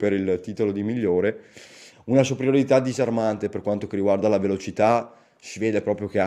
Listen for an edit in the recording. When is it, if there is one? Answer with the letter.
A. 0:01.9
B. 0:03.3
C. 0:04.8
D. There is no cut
A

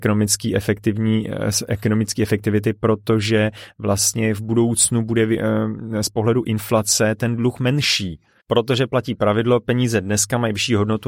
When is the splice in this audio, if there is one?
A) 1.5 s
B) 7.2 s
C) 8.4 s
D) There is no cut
C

